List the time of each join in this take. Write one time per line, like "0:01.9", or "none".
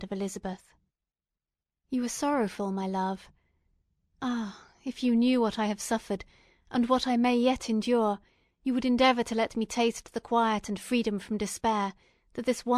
none